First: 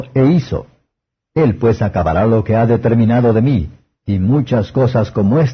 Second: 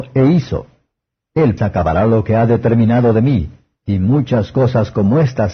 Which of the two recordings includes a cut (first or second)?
second